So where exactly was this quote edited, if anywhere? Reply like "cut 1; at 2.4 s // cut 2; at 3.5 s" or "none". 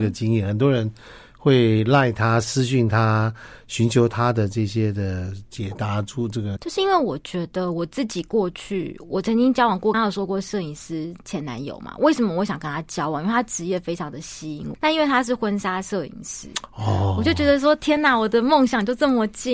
cut 1; at 6.6 s // cut 2; at 9.9 s // cut 3; at 14.7 s